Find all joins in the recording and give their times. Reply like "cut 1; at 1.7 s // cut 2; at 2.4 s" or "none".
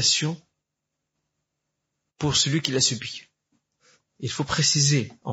cut 1; at 4.2 s